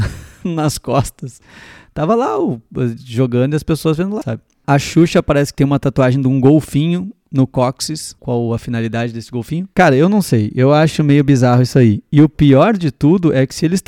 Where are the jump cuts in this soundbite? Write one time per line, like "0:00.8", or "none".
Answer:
0:04.2
0:09.7